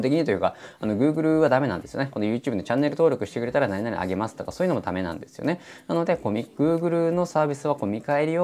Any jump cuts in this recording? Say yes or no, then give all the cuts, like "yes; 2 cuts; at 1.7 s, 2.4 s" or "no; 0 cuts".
no; 0 cuts